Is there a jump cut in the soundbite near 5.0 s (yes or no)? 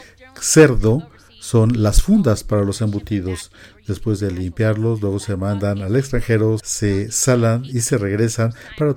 no